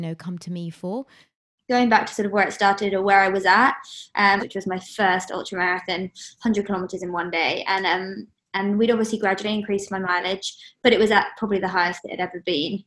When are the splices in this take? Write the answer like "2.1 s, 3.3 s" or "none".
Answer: 1.6 s, 4.4 s